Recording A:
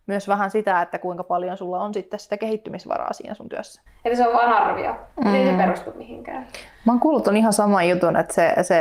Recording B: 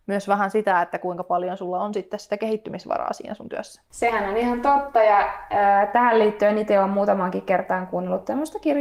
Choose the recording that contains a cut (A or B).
A